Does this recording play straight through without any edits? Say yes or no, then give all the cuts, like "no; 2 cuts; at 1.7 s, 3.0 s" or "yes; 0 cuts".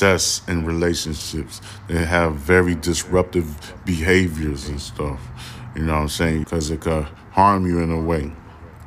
no; 1 cut; at 6.4 s